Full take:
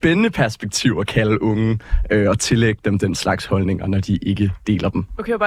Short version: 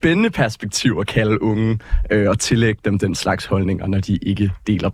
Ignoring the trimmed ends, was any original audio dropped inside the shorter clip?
no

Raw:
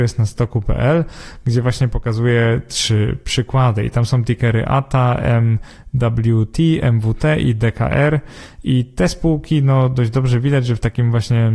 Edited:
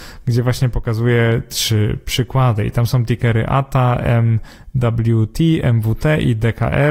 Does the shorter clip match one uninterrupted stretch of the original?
yes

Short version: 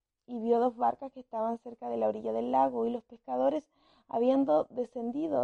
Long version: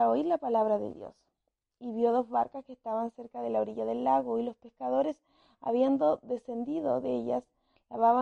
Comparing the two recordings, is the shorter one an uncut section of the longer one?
yes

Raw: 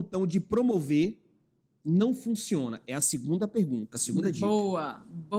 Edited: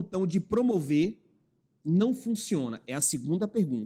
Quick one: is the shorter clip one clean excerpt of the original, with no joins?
yes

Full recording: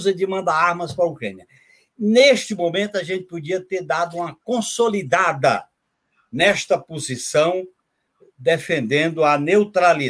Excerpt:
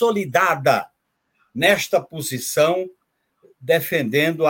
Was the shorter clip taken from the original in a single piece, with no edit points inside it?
yes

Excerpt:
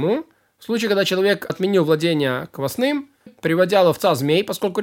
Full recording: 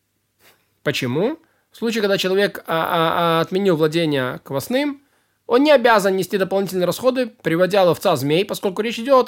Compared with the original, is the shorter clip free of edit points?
no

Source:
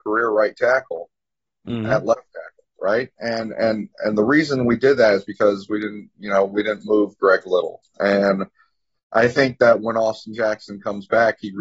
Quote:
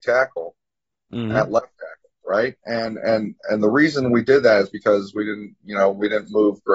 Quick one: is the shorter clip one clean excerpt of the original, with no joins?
yes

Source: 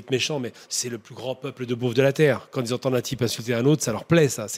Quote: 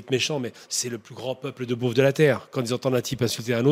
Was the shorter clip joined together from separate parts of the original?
no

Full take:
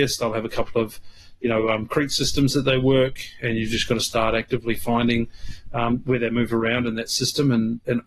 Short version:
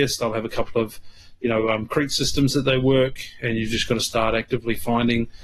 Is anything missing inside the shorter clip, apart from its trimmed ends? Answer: no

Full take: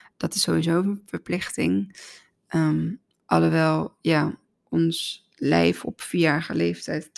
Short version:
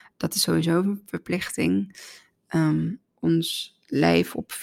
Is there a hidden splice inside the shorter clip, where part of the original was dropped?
yes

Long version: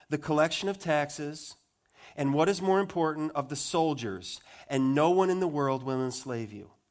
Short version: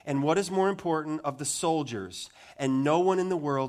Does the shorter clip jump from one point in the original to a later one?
no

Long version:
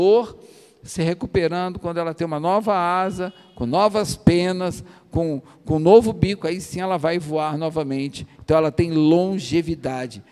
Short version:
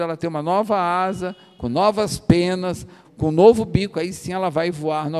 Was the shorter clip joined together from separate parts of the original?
yes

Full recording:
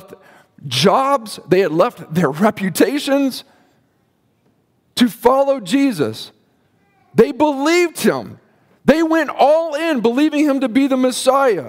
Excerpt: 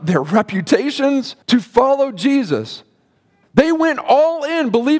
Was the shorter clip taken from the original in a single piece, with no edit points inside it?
no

